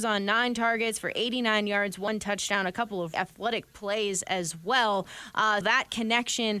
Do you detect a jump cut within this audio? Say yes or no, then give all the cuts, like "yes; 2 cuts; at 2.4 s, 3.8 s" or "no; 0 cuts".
yes; 2 cuts; at 3.1 s, 5.6 s